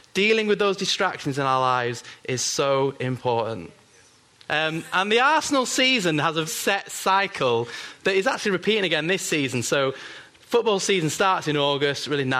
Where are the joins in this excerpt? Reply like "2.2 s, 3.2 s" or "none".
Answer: 4.5 s, 6.5 s